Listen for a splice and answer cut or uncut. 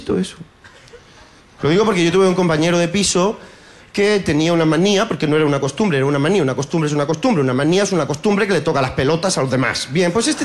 cut